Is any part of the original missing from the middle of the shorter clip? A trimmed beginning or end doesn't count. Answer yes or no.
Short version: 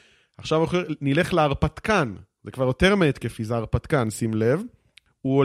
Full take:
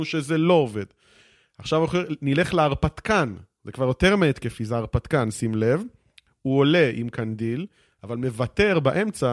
no